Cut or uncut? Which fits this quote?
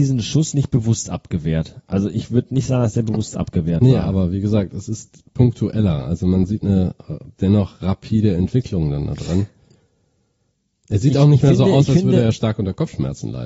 uncut